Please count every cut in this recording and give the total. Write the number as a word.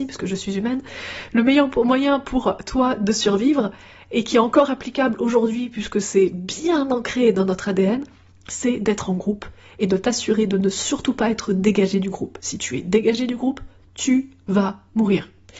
zero